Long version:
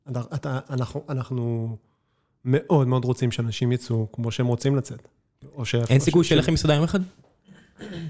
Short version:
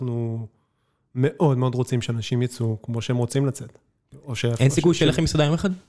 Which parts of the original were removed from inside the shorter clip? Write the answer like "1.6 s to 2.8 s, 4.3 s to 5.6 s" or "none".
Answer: none